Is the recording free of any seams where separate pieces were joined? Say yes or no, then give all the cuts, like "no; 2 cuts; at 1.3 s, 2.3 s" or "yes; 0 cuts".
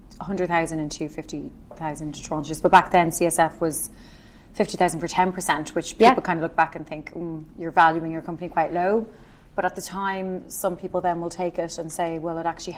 yes; 0 cuts